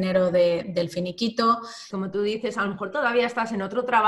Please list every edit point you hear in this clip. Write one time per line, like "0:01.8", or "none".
0:01.9